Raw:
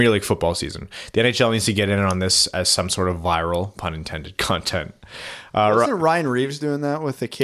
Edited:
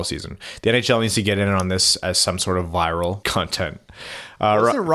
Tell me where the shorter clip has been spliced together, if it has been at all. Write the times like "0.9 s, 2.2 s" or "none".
3.2 s